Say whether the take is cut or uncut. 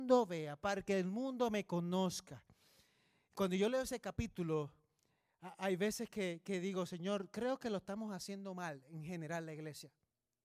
uncut